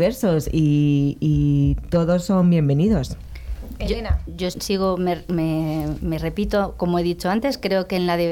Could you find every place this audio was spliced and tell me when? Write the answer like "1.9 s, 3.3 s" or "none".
4.5 s